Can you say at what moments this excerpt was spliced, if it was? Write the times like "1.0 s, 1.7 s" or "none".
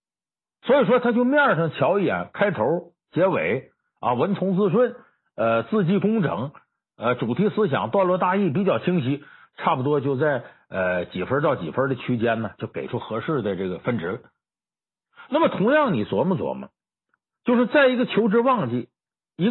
none